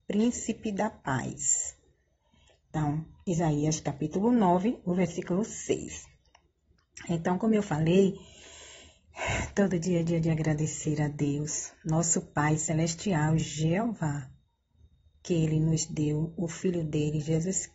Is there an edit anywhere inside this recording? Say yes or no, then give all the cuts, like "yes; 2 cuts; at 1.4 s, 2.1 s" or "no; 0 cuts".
no; 0 cuts